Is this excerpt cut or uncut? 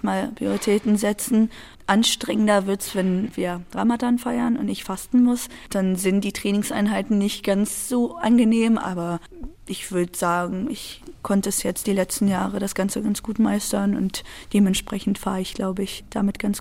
uncut